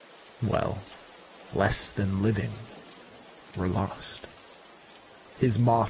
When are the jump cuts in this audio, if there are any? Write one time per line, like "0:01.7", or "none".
none